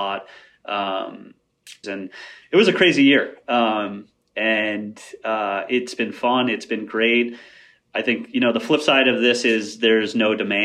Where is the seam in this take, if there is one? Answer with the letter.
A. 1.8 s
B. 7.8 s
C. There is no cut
A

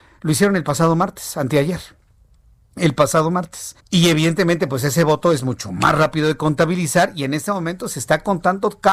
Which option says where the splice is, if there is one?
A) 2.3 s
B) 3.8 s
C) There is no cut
B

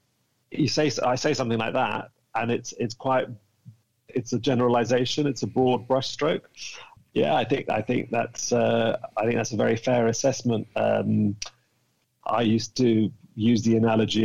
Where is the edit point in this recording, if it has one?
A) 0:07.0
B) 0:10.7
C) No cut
A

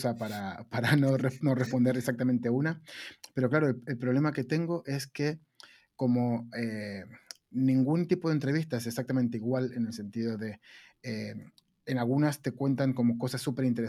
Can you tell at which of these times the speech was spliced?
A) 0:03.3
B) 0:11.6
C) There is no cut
C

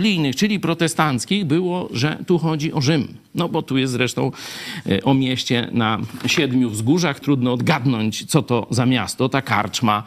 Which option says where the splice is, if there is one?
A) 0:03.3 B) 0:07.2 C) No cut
B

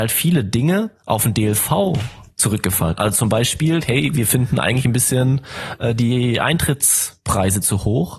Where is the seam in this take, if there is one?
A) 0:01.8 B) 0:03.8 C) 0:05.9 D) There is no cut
B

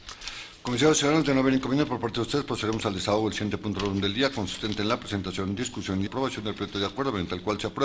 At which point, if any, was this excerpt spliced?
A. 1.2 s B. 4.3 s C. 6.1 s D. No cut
C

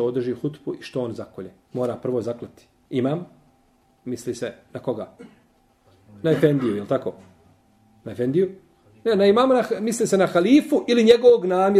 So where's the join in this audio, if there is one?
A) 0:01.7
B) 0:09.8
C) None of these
C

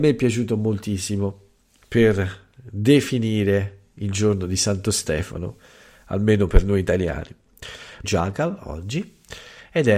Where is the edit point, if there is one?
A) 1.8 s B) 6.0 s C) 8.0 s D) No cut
C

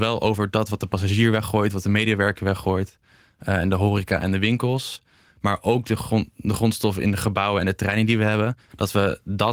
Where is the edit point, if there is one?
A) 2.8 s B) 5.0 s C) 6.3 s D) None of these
D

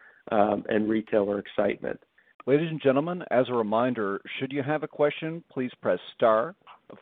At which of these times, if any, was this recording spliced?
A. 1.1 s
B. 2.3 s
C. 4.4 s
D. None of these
B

